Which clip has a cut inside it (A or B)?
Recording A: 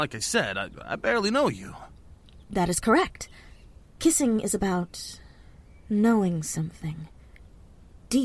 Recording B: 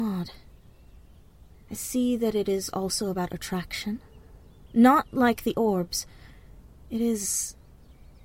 B